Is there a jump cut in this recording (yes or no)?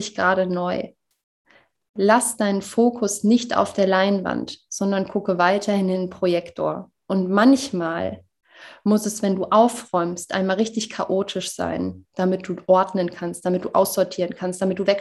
no